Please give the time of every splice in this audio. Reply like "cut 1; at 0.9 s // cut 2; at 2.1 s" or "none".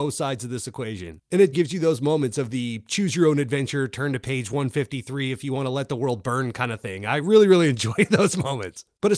cut 1; at 1.5 s